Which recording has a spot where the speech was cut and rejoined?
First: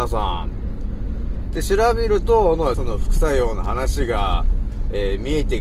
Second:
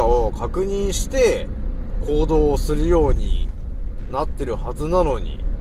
first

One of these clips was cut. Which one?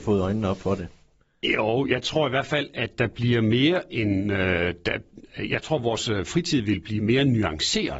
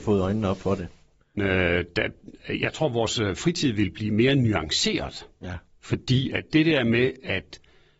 second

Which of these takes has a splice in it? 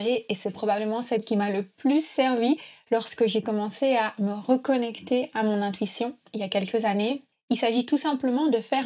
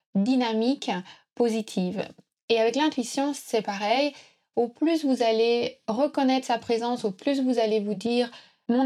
first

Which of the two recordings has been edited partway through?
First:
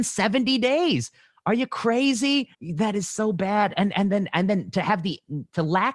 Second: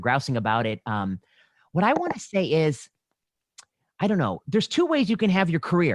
first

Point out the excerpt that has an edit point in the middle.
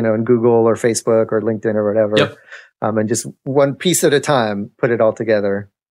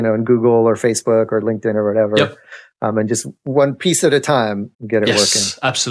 second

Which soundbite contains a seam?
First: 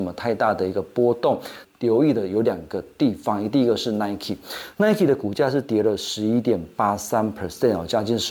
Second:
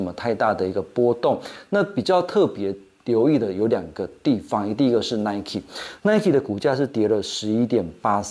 first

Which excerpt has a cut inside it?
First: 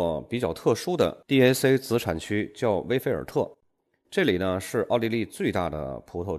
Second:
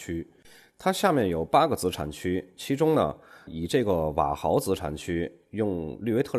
second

